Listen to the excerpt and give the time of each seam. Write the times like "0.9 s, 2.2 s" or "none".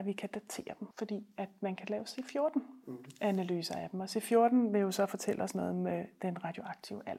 0.9 s